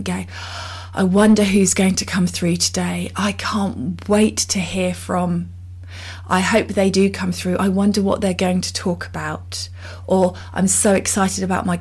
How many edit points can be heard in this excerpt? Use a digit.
0